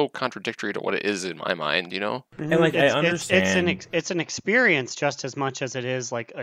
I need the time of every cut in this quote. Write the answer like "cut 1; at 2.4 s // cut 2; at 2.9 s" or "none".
none